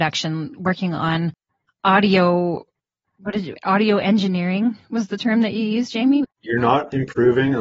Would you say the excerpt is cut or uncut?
cut